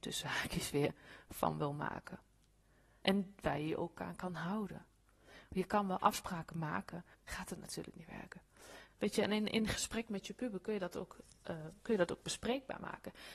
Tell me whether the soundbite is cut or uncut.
cut